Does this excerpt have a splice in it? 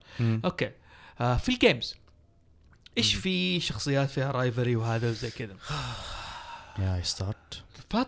no; 0 cuts

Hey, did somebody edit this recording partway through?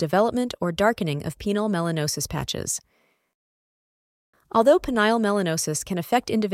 yes; 1 cut; at 4.3 s

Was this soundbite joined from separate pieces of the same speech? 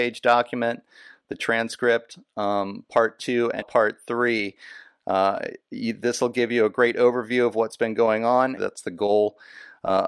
yes; 2 cuts; at 3.6 s, 8.6 s

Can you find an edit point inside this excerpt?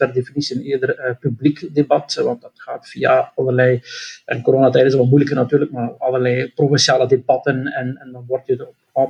no; 0 cuts

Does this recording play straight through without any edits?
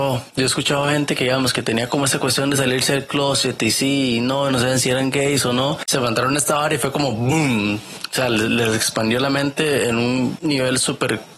yes; 0 cuts

